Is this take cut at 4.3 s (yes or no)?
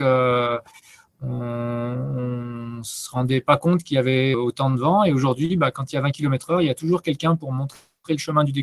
yes